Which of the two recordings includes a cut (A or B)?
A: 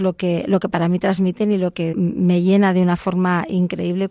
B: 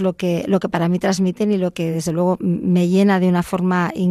A